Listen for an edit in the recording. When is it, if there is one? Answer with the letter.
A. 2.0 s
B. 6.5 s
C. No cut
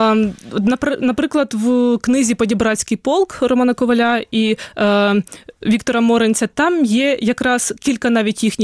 C